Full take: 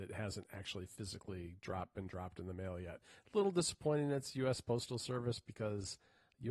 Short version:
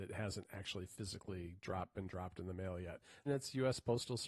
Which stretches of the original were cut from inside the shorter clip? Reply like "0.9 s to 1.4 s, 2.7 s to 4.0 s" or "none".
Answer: 3.3 s to 4.1 s